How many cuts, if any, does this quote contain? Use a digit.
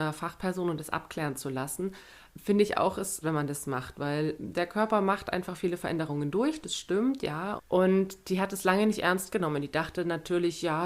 2